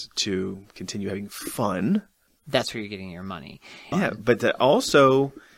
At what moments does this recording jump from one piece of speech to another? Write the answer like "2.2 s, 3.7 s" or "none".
2.3 s, 3.9 s